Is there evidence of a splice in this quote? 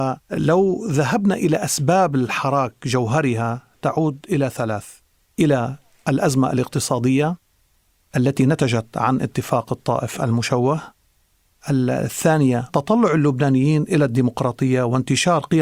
no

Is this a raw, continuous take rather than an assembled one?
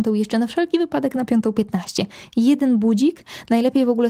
yes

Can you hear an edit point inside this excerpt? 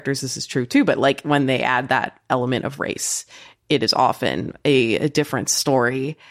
no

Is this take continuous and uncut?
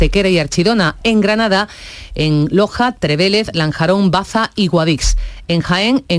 yes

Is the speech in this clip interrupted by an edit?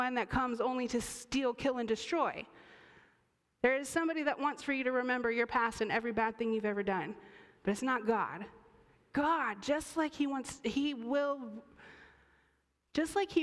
no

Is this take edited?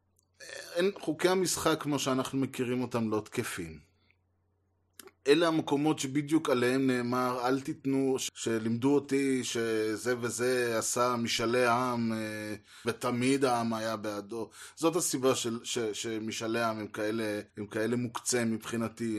yes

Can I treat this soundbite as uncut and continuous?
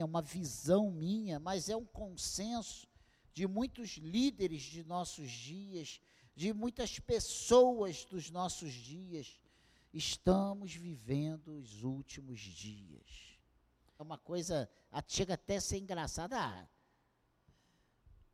no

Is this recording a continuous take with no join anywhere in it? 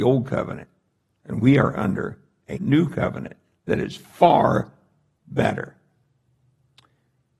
no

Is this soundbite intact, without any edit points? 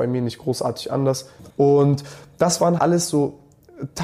no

